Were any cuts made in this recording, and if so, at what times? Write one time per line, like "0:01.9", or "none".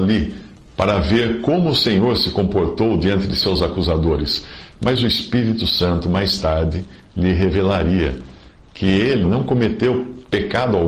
0:09.2

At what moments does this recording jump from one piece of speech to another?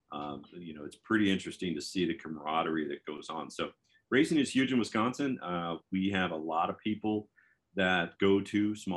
none

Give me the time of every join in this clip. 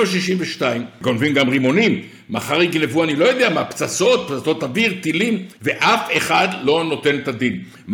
0:05.6

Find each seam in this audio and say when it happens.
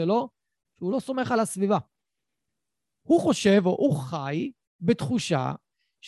none

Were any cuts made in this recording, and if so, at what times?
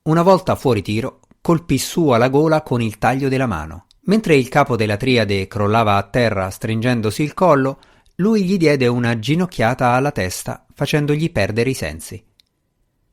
0:04.0

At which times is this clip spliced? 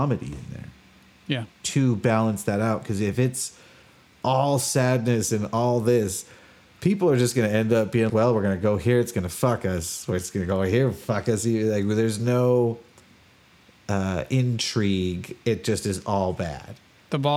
0:08.1

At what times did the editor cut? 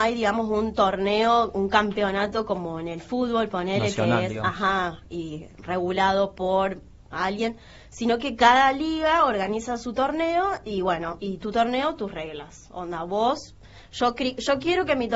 0:11.2

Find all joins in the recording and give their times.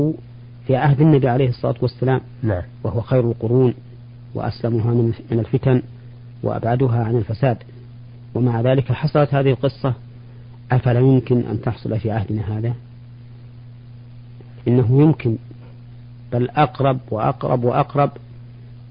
none

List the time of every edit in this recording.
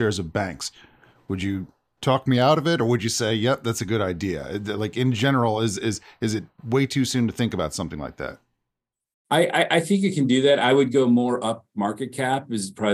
none

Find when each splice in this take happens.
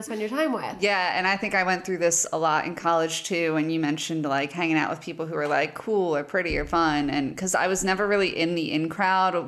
none

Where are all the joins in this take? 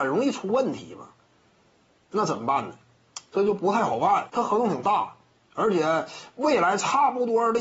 0:04.3

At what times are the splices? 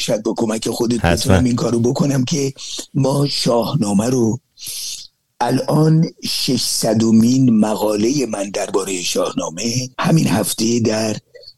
0:01.0
0:09.9

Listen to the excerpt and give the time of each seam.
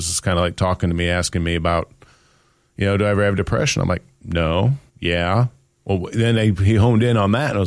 0:04.9

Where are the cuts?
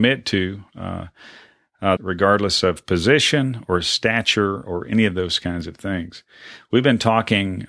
0:02.0

